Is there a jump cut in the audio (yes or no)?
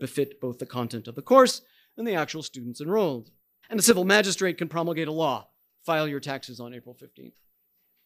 yes